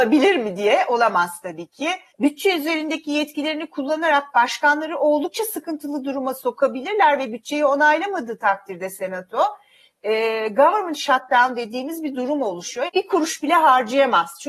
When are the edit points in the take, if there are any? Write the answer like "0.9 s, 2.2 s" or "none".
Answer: 2.1 s, 12.9 s

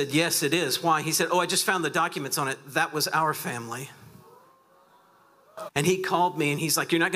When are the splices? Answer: 5.7 s

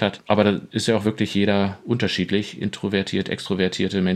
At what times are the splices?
none

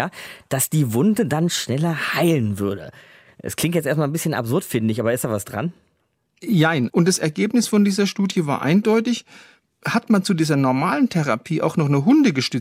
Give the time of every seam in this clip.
6.9 s

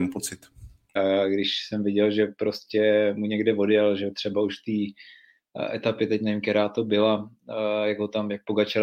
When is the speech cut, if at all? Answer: 1.0 s

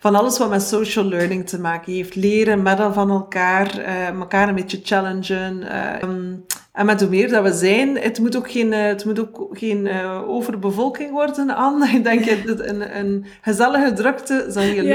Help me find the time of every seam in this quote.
6.0 s

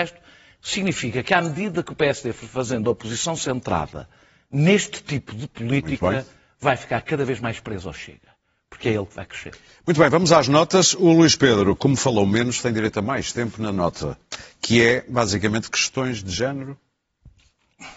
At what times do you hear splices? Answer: none

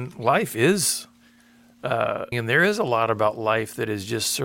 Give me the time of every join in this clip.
2.3 s

